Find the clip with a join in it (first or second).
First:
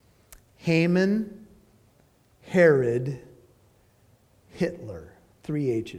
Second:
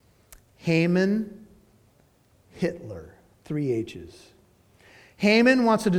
second